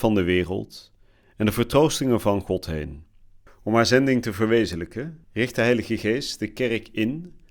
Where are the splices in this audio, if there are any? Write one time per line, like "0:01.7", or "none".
0:03.5
0:05.2

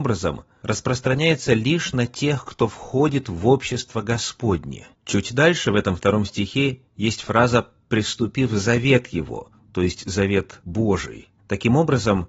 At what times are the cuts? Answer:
0:04.9

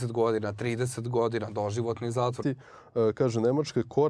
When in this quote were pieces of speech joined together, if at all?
0:02.4

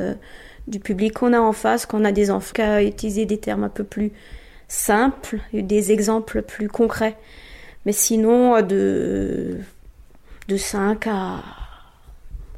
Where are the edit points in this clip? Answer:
0:02.5

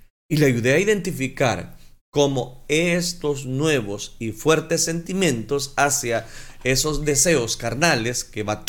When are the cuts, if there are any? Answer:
none

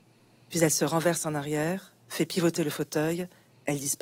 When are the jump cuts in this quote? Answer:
none

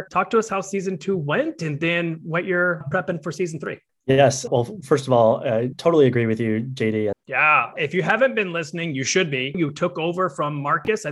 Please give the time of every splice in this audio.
0:07.1
0:09.5

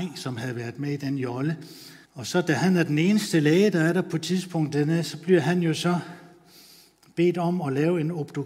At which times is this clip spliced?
0:02.0

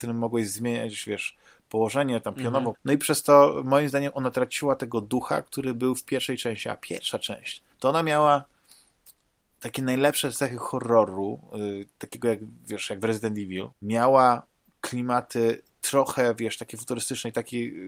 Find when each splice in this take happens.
0:02.7
0:07.7
0:13.7

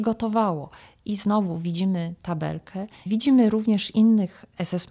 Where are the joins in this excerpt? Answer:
0:03.1

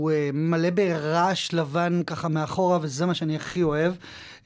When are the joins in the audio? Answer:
none

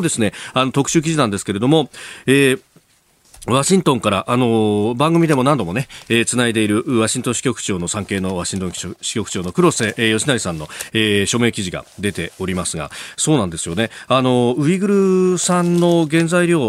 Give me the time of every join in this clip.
none

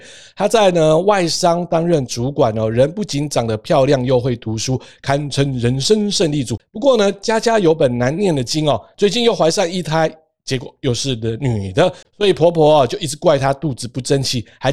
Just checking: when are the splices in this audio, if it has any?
0:08.9

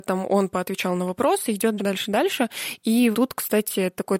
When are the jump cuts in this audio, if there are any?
0:01.8
0:03.1

